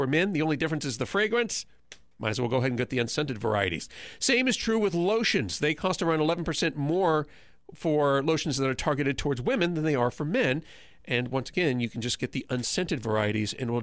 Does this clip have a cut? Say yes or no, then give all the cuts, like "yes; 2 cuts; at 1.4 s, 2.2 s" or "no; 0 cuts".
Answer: no; 0 cuts